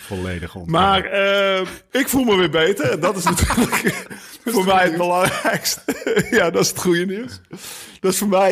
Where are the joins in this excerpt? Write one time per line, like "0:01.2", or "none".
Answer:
none